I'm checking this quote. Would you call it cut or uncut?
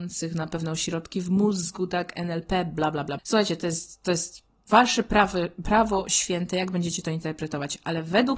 cut